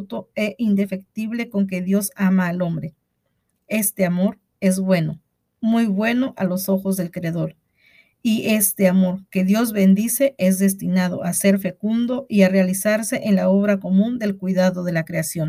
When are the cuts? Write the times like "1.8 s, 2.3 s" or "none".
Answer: none